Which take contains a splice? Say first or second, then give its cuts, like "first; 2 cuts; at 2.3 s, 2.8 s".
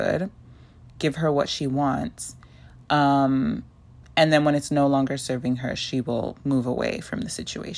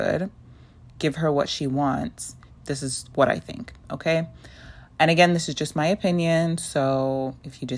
second; 1 cut; at 2.5 s